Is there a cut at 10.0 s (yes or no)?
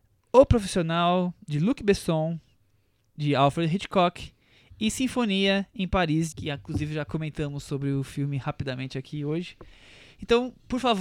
no